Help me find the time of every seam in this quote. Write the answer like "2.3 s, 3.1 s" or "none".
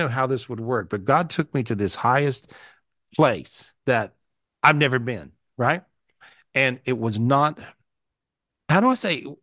3.8 s